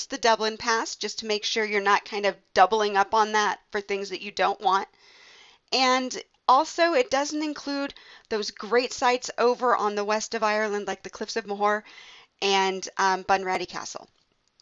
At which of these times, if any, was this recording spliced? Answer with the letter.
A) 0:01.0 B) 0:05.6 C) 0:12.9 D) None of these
D